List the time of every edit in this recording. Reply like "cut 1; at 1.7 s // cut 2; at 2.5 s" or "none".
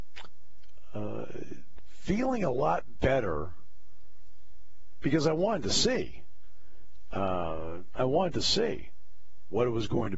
none